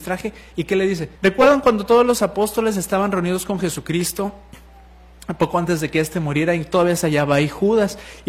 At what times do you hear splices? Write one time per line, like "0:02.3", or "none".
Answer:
0:01.2